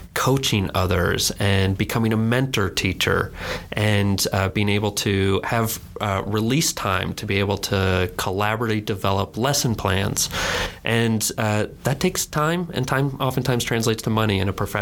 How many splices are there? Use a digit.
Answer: 0